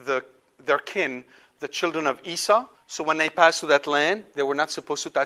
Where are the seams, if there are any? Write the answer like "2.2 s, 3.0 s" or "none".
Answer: 2.7 s